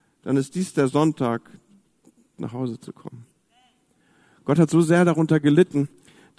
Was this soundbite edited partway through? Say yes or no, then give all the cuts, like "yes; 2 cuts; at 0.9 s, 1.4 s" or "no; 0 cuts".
yes; 1 cut; at 2.4 s